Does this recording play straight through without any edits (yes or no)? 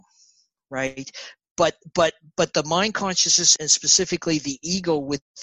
no